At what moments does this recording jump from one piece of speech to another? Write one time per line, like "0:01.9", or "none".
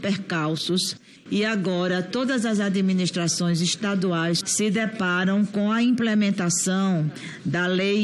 0:04.4

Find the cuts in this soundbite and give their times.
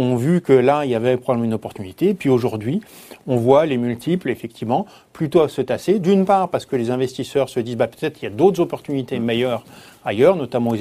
none

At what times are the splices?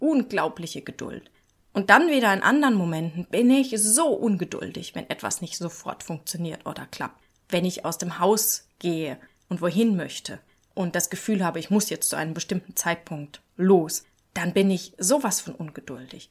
none

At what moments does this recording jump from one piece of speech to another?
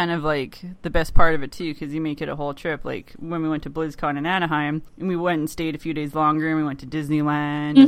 0:04.9

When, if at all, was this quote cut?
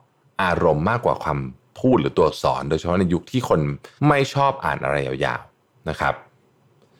0:04.0

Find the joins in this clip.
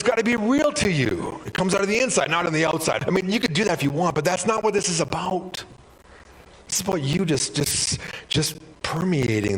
0:03.0

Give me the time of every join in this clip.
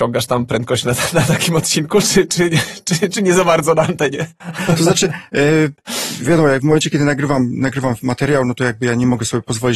none

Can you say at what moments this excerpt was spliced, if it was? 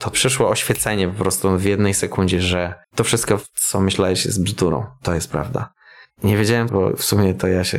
0:02.8
0:06.7

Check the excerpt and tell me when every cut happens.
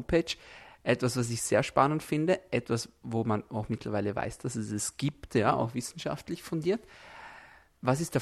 none

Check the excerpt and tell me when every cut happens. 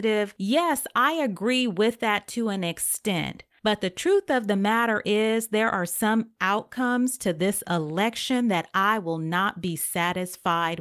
none

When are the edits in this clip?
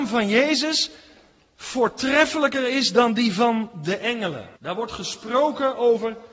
0:04.6

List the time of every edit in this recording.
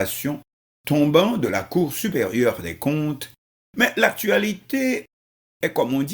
0:03.6

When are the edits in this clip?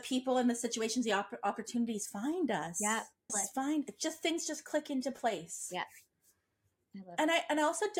0:03.3

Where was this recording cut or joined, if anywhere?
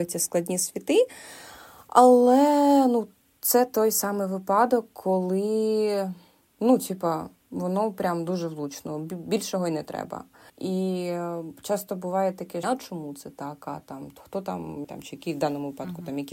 0:12.6
0:14.8

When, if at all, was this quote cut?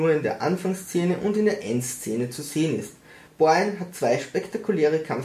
0:03.3

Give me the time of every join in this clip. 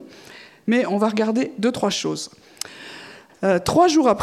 0:03.3

